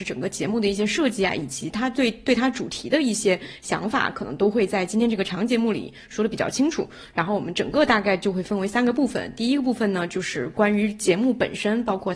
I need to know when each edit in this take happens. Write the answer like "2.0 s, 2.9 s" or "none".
none